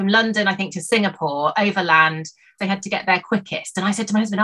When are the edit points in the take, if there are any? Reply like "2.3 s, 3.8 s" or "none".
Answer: 2.6 s